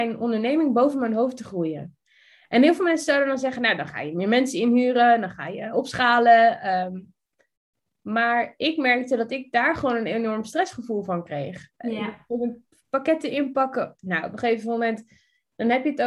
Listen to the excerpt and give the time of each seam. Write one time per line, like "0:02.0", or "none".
none

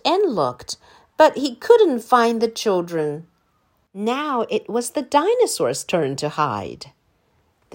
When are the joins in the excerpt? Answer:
0:03.9

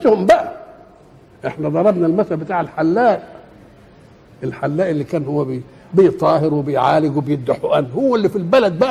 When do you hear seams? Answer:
none

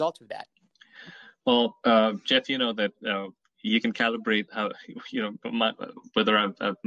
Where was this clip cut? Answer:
none

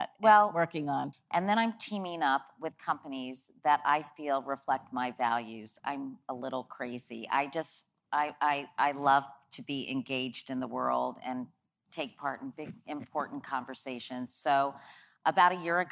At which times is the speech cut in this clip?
0:01.1
0:05.8

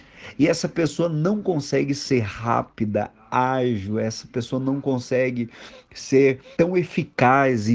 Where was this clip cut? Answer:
0:06.6

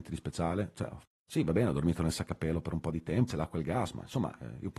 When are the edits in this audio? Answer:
0:03.3

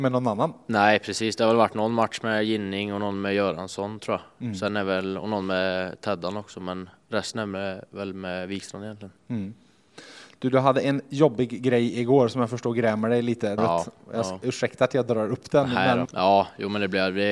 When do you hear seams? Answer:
0:13.6
0:16.0

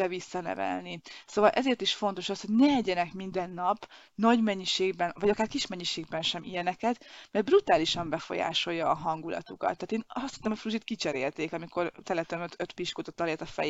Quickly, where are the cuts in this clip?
none

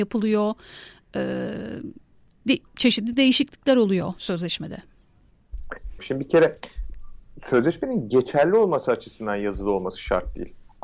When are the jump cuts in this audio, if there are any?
0:06.0

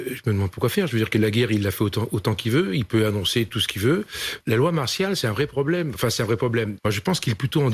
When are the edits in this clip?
0:04.4
0:06.8

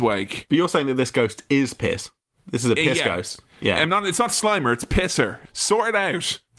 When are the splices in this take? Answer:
0:05.4

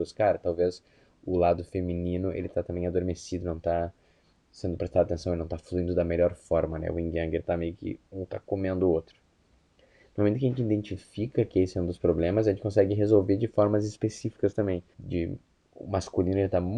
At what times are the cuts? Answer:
0:14.9

